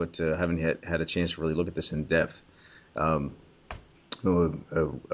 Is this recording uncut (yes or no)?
yes